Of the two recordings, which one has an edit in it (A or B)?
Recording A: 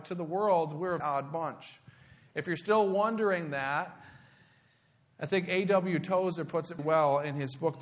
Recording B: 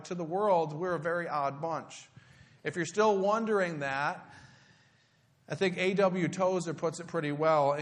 A